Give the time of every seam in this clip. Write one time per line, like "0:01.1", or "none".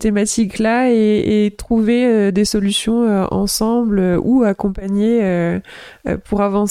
none